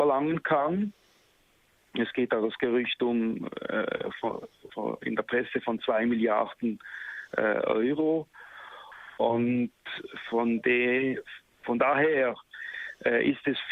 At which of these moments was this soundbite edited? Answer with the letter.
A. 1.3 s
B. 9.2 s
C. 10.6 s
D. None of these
D